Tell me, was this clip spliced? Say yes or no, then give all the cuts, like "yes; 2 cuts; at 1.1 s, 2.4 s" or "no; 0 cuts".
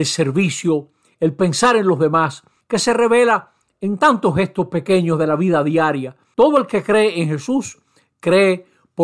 yes; 2 cuts; at 2.6 s, 6.3 s